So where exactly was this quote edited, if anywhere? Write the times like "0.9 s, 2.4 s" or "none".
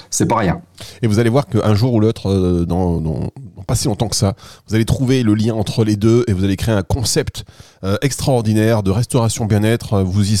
none